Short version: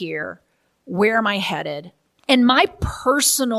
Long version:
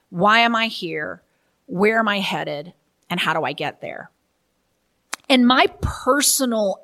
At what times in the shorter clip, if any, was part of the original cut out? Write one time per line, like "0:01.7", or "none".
0:02.2